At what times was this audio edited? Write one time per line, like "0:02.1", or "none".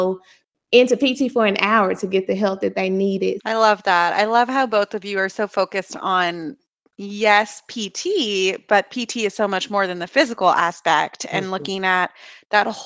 0:03.4